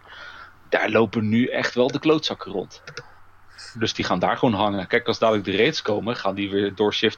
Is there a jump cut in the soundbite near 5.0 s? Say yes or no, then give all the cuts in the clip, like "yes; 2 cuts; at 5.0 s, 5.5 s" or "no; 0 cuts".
no; 1 cut; at 3.7 s